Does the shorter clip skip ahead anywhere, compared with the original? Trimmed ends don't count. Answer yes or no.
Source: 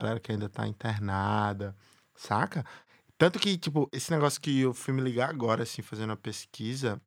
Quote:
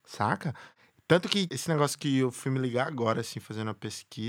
yes